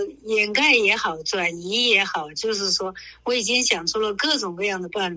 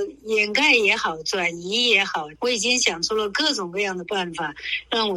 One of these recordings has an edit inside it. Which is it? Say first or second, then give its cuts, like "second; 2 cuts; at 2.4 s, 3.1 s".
second; 1 cut; at 2.3 s